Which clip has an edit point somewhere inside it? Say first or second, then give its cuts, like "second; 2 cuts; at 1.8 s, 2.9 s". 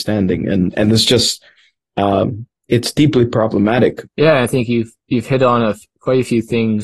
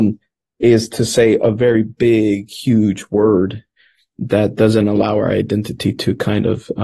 first; 1 cut; at 4.1 s